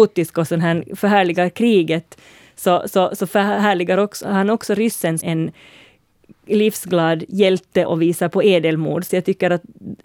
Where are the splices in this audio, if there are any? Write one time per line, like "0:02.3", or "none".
0:05.2
0:07.9
0:09.1